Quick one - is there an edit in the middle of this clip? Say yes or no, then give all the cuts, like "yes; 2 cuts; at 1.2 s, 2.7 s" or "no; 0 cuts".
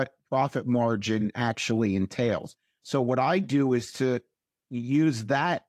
no; 0 cuts